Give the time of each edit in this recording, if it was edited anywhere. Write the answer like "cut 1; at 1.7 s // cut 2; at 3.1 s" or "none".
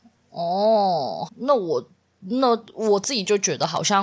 cut 1; at 1.3 s